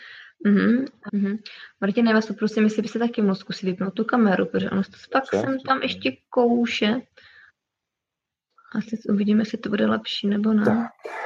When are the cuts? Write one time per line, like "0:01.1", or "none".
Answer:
0:01.1

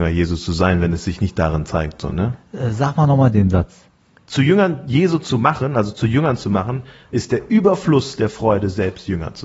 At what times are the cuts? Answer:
none

